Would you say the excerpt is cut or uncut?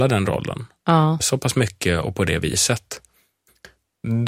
cut